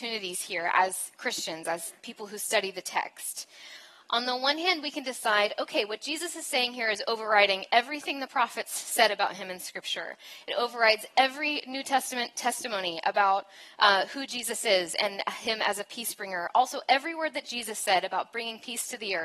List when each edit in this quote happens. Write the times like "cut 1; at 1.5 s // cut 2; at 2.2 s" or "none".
none

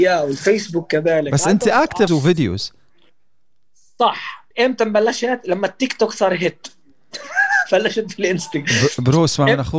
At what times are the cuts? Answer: cut 1; at 2.1 s // cut 2; at 4.5 s

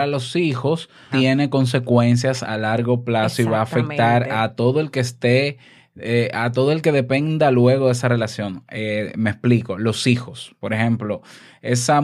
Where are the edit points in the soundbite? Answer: cut 1; at 1.1 s

